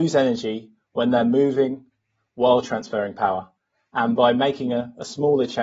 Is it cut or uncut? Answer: uncut